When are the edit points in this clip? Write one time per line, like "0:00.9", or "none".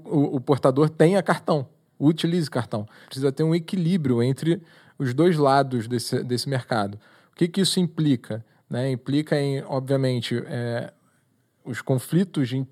0:03.0